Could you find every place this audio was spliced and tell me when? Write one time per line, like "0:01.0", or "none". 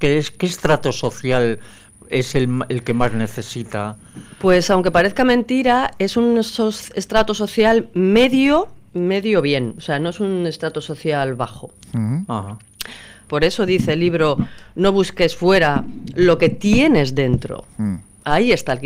0:08.9
0:13.3